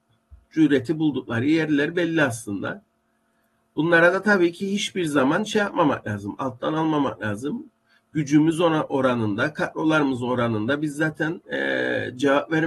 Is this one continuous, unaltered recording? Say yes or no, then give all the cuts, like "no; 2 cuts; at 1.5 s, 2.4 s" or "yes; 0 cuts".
yes; 0 cuts